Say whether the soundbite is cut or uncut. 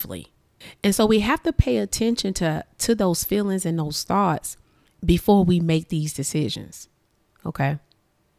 uncut